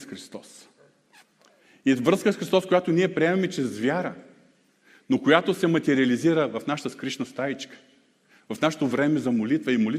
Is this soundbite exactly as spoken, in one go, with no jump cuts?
yes; 0 cuts

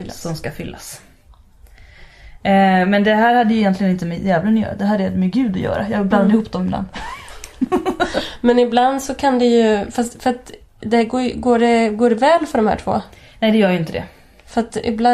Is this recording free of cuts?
yes; 0 cuts

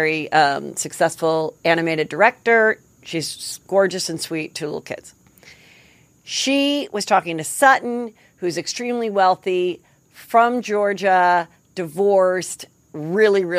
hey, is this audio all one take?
yes; 0 cuts

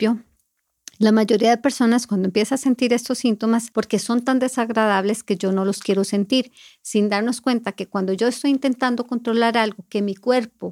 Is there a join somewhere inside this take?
yes; 1 cut; at 3.7 s

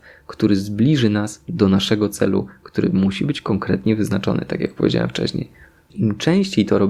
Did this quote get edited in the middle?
yes; 1 cut; at 5.9 s

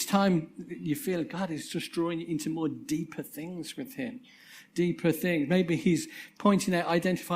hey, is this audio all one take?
yes; 0 cuts

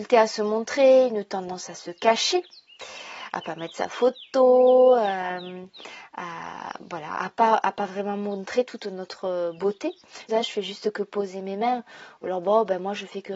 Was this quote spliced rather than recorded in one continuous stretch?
yes; 2 cuts; at 7.2 s, 10.3 s

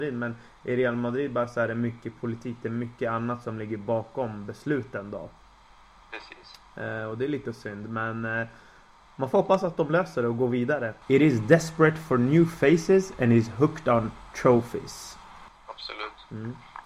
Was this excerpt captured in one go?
no; 2 cuts; at 11.0 s, 15.5 s

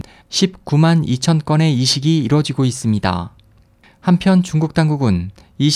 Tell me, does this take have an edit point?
no; 0 cuts

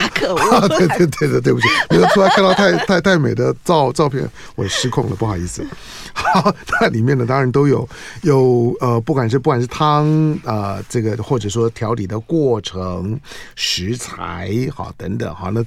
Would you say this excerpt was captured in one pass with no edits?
yes; 0 cuts

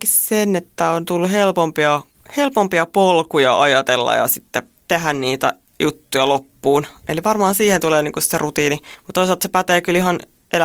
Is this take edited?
no; 0 cuts

